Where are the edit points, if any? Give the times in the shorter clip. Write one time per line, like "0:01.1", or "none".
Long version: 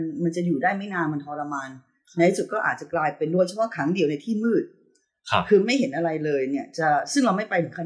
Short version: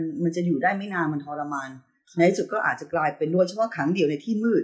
none